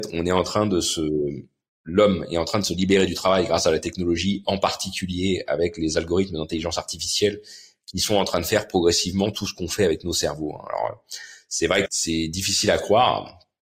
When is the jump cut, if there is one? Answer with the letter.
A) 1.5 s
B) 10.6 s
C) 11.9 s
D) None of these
C